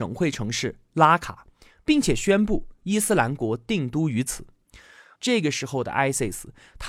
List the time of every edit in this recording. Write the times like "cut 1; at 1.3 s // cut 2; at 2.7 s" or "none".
cut 1; at 5.1 s